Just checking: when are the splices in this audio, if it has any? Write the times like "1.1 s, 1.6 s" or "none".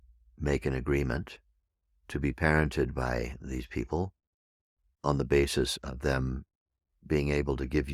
none

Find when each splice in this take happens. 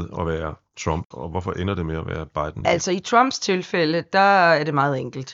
none

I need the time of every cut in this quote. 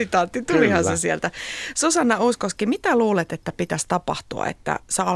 none

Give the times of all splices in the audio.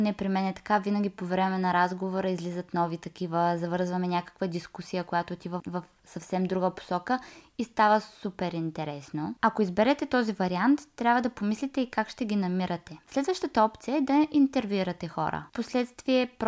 13.0 s, 15.5 s

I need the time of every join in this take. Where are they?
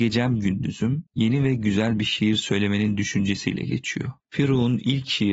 1.1 s, 4.2 s

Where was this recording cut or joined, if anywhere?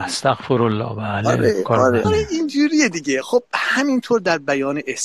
2.0 s

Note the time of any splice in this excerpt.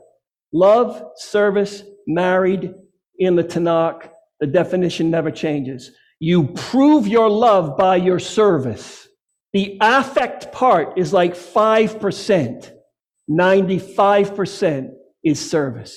none

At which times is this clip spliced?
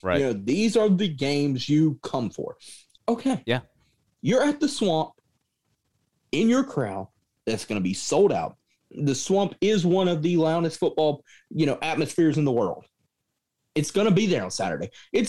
3.0 s

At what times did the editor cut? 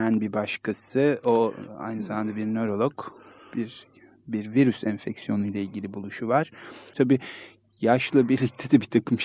6.9 s

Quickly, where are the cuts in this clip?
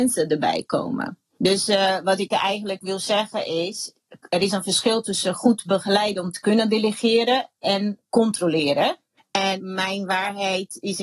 9.2 s

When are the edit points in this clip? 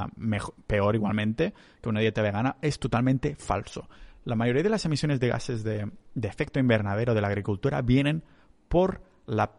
none

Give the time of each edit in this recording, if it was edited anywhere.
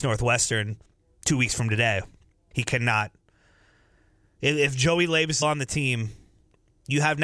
2.5 s, 5.4 s

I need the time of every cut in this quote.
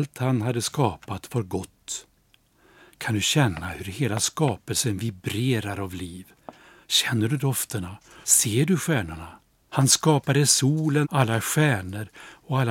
8.2 s, 9.7 s, 11.0 s

